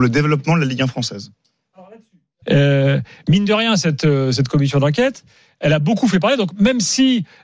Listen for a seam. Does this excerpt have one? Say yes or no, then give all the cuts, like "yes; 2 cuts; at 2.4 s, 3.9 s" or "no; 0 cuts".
yes; 1 cut; at 2.4 s